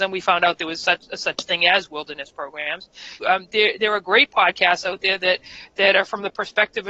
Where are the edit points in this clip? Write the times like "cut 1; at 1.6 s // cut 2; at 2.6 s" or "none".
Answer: cut 1; at 3.2 s